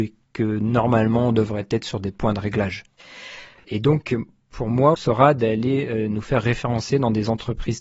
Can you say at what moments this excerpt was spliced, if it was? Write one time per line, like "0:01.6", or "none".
0:03.6
0:05.0